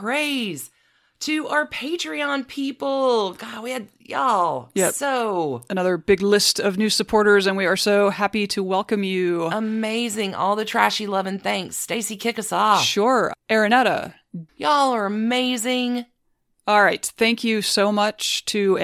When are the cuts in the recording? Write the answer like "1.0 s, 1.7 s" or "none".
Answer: 14.5 s